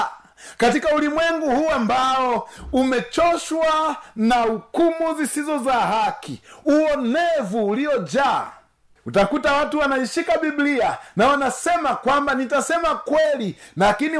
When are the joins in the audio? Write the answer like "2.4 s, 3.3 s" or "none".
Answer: none